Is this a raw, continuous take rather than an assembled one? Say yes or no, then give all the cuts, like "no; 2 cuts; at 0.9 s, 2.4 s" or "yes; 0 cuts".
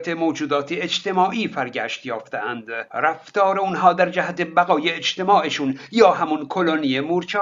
yes; 0 cuts